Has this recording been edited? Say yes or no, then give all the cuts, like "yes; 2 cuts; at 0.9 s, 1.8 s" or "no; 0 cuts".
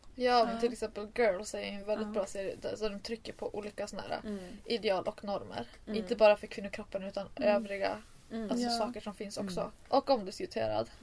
yes; 1 cut; at 9.9 s